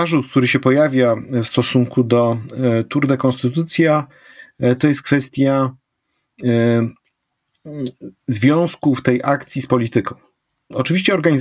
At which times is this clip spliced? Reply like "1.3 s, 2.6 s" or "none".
none